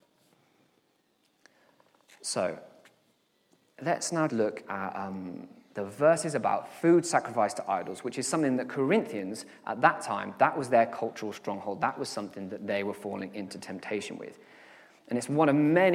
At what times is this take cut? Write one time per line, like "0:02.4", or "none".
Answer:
0:04.3